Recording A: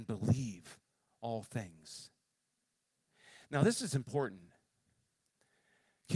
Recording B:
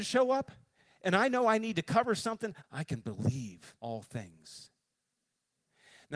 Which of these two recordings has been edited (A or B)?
B